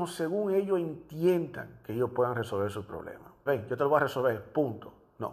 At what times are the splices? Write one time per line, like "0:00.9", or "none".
0:03.5